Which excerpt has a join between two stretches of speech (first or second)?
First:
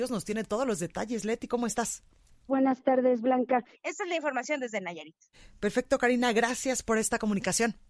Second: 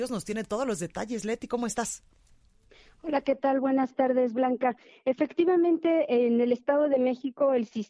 first